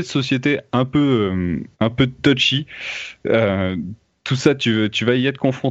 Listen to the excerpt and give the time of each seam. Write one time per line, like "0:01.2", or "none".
0:01.7